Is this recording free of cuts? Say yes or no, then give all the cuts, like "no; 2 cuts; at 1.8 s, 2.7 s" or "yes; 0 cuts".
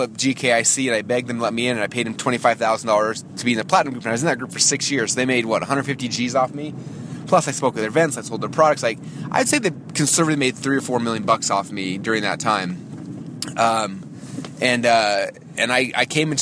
yes; 0 cuts